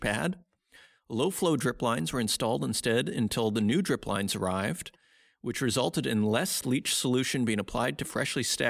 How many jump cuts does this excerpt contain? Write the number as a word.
zero